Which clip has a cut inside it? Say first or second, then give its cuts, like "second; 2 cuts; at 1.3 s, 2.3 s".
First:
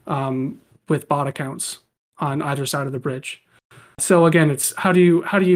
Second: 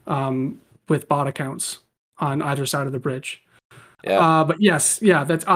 first; 1 cut; at 4.0 s